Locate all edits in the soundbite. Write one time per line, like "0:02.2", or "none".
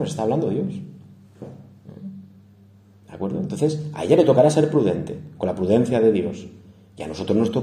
none